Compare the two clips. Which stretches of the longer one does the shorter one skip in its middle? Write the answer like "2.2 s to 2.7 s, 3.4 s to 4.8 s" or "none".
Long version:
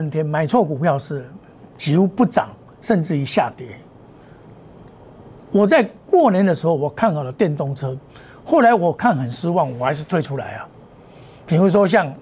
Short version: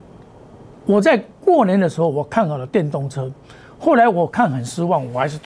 none

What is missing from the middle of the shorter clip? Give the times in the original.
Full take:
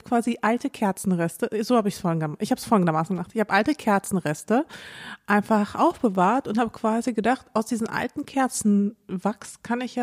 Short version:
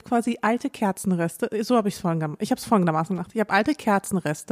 none

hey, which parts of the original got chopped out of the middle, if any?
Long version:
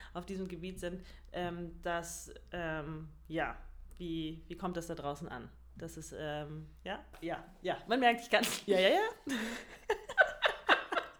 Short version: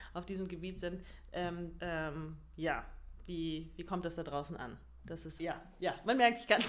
1.8 s to 2.5 s, 6.1 s to 7.2 s

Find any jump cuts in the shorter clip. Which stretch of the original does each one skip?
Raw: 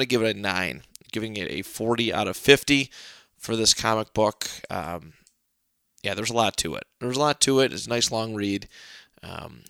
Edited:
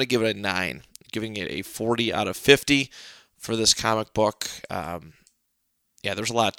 none

